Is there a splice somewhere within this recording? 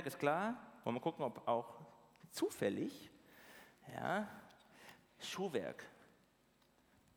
no; 0 cuts

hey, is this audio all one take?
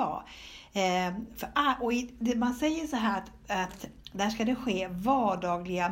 yes; 0 cuts

